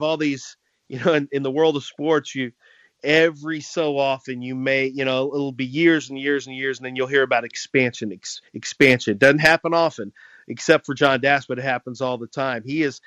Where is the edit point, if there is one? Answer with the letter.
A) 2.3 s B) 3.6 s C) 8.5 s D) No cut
C